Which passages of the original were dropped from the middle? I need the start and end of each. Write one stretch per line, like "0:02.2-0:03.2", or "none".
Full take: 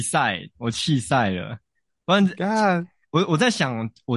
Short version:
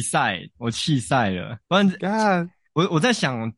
0:01.6-0:02.0